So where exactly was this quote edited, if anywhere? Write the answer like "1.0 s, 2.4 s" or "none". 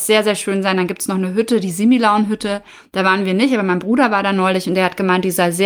none